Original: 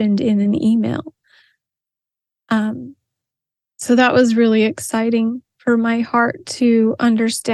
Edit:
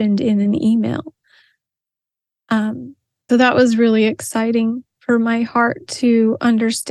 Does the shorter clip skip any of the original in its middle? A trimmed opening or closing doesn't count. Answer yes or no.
yes